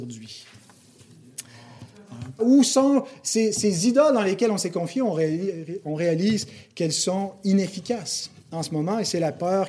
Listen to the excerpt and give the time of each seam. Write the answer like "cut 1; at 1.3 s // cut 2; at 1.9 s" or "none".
cut 1; at 2.4 s

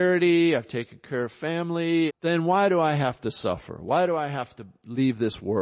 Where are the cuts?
cut 1; at 2.1 s

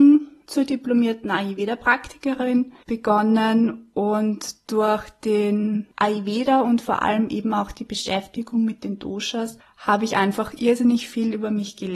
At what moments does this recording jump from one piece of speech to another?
none

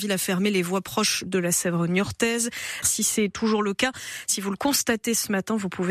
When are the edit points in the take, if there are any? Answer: cut 1; at 2.8 s

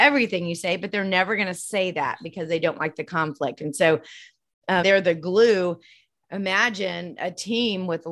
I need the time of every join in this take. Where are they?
cut 1; at 4.8 s

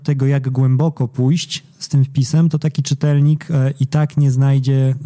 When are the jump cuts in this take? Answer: none

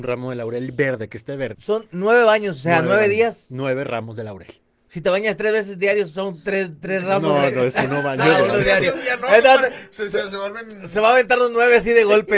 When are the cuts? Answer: cut 1; at 1.5 s

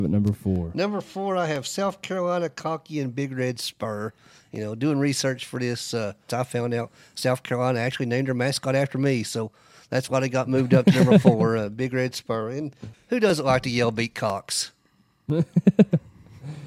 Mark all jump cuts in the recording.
cut 1; at 6.3 s // cut 2; at 12.9 s

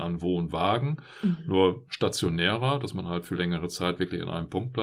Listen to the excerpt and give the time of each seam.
none

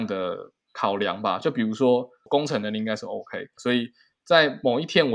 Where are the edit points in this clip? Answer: cut 1; at 2.3 s // cut 2; at 3.6 s

